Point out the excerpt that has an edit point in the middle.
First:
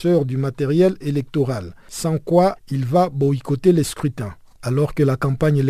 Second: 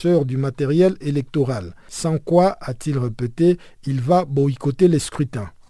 first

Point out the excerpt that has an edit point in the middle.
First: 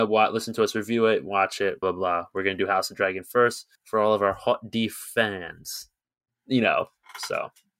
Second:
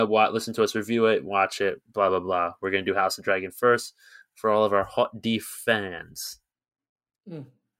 first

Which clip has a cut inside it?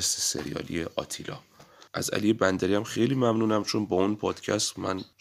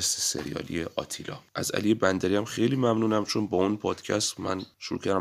second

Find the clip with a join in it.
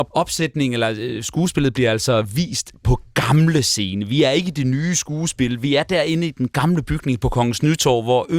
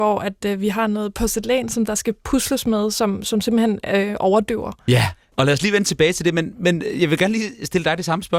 second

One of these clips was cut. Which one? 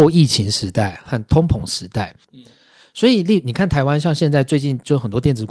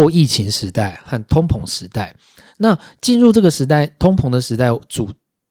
first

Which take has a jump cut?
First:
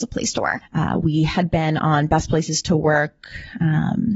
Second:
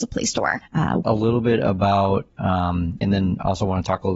second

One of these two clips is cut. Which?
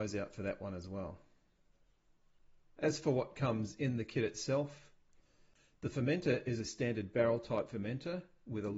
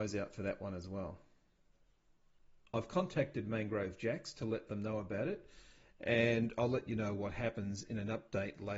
second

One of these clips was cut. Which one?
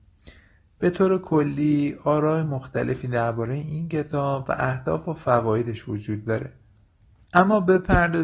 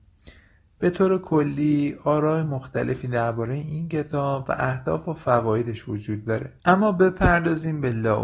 second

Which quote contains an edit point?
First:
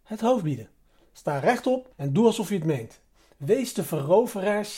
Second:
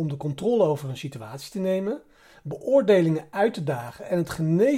first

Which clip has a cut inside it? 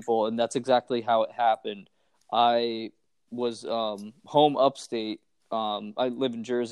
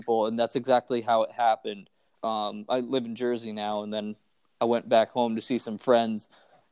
second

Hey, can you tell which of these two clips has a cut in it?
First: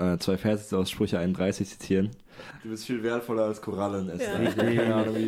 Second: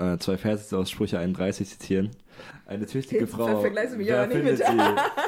first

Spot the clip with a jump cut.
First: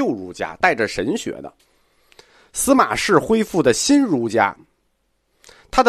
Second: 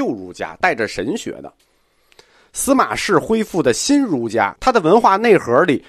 second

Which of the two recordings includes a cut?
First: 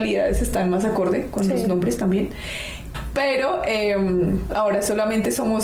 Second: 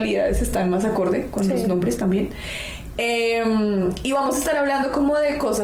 first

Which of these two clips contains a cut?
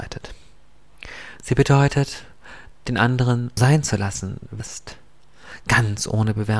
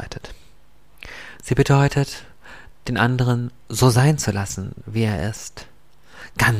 first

